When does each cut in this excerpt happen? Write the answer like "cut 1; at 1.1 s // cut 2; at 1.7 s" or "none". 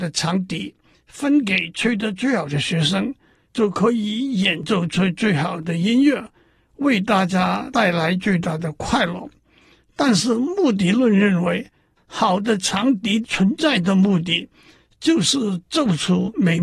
none